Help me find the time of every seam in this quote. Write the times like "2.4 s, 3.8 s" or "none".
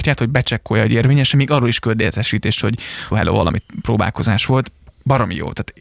3.1 s